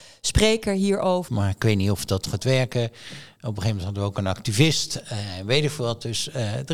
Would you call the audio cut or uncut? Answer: cut